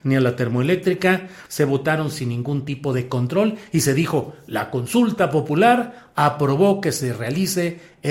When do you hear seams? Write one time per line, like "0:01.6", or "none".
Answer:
0:01.5